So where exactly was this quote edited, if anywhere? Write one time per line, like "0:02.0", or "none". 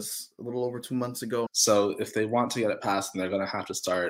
0:01.5